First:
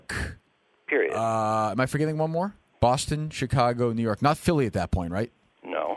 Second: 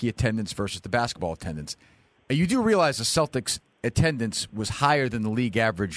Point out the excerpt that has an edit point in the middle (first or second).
first